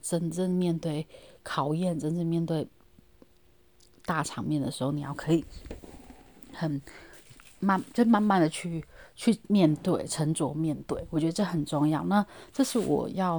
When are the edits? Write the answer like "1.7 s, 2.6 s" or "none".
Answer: none